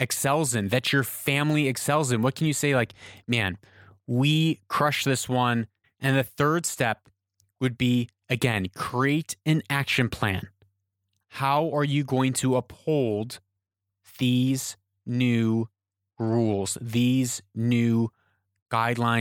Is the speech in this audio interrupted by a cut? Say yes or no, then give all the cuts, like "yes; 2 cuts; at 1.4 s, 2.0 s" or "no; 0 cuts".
yes; 1 cut; at 5.8 s